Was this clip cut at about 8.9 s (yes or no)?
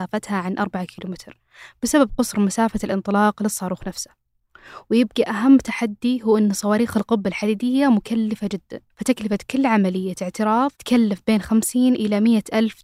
yes